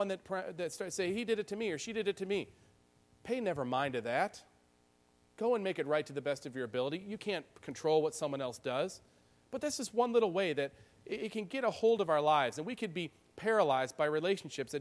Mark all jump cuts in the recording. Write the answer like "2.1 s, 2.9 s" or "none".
none